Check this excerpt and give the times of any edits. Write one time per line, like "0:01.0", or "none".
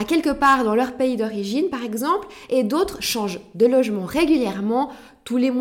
none